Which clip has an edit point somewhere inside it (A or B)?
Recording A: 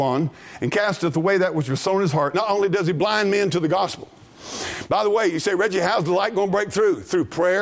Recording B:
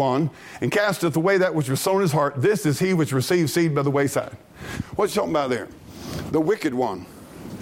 A